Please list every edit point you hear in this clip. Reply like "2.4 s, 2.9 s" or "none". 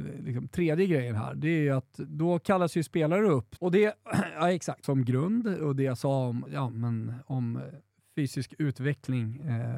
3.6 s, 4.8 s, 6.5 s